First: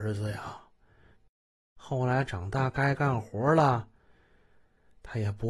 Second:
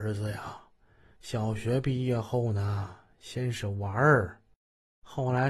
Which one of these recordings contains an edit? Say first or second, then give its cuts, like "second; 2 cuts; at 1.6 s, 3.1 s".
first; 1 cut; at 1.2 s